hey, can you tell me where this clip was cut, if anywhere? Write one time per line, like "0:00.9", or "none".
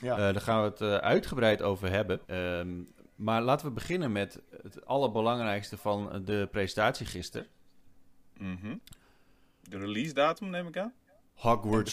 0:02.2